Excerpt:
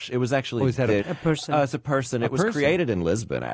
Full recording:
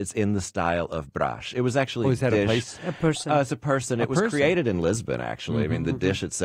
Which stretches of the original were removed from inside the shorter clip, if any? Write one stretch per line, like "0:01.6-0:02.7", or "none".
0:02.4-0:02.8